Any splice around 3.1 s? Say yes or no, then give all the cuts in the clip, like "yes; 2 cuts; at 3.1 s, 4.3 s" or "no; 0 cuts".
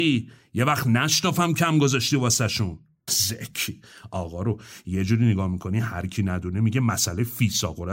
yes; 1 cut; at 3.1 s